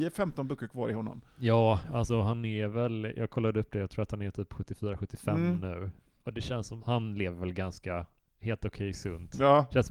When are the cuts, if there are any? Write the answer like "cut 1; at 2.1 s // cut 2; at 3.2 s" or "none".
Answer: cut 1; at 6.8 s